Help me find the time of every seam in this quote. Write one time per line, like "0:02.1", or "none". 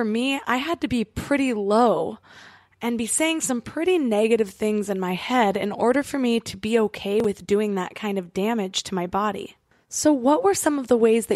none